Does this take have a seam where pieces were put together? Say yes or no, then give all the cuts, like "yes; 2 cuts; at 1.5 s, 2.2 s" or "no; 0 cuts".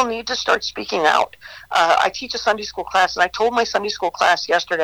no; 0 cuts